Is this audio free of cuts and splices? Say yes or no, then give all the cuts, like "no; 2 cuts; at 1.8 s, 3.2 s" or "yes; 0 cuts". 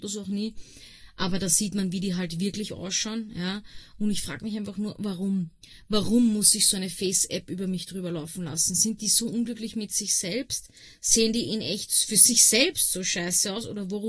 yes; 0 cuts